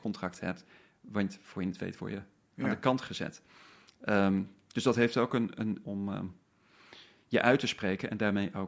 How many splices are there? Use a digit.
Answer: 1